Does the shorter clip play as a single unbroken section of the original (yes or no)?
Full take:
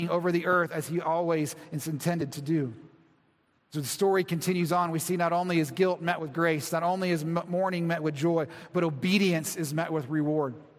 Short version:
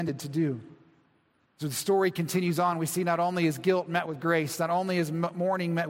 yes